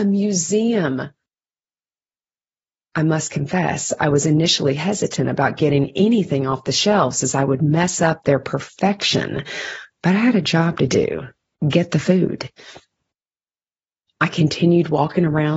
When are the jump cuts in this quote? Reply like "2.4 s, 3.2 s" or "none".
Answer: none